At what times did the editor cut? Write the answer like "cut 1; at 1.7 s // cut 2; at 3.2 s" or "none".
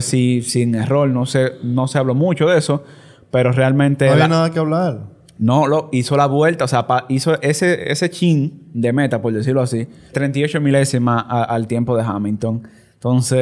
cut 1; at 10.1 s